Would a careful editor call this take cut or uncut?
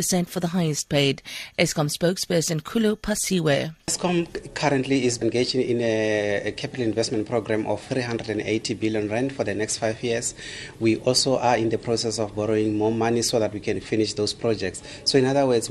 uncut